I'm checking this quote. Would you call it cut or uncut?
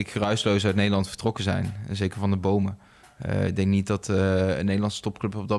uncut